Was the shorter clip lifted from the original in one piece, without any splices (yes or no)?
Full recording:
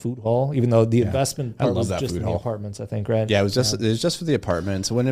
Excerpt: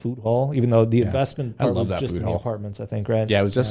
yes